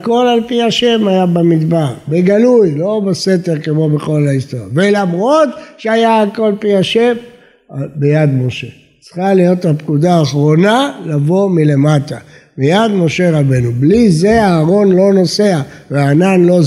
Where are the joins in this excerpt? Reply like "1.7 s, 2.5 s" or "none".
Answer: none